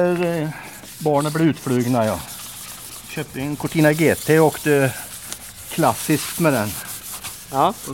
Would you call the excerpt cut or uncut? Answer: uncut